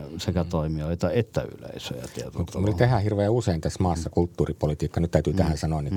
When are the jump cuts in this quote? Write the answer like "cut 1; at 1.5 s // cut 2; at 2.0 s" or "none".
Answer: none